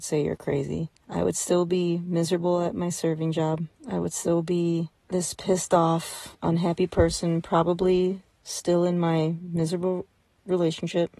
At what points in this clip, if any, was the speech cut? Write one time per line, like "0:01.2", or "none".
none